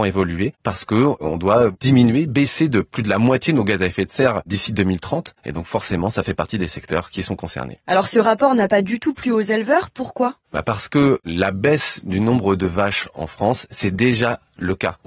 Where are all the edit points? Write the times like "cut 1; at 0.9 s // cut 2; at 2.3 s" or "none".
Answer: none